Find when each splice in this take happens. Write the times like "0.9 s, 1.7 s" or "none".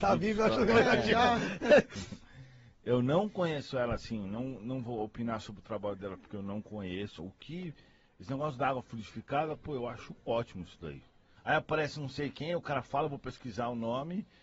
7.2 s, 11.4 s